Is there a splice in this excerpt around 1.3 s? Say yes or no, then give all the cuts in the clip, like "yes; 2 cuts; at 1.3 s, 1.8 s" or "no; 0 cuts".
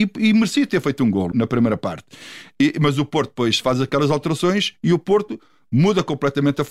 yes; 1 cut; at 1.3 s